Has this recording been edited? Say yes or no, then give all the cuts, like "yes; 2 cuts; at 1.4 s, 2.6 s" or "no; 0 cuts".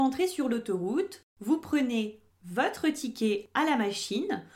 no; 0 cuts